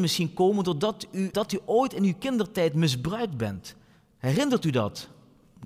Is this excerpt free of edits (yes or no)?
no